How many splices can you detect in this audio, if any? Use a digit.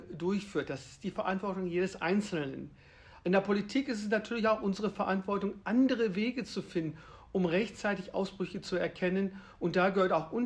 0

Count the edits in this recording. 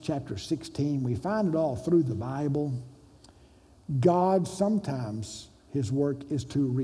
0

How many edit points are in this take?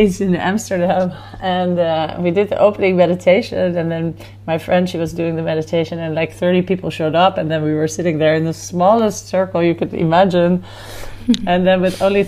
0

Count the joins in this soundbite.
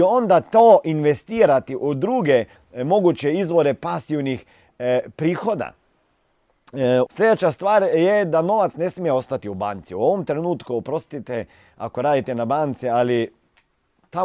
1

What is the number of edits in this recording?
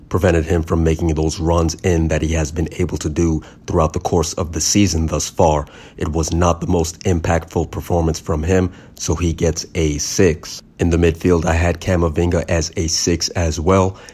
0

